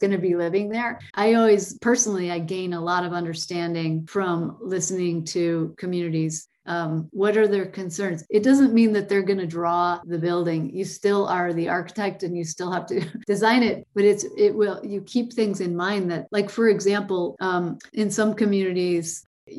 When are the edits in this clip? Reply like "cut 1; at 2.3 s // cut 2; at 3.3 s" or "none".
cut 1; at 1.1 s